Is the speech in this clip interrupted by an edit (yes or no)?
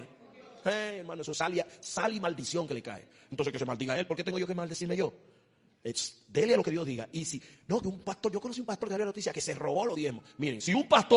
yes